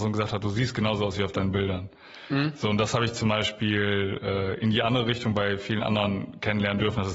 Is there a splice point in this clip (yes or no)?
no